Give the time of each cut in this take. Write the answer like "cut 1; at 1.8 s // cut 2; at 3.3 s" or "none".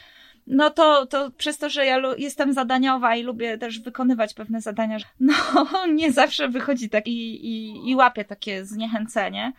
cut 1; at 5.0 s // cut 2; at 7.0 s